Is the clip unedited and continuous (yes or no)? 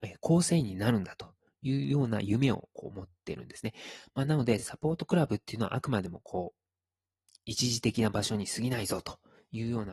yes